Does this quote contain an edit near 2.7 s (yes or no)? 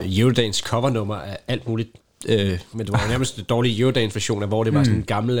yes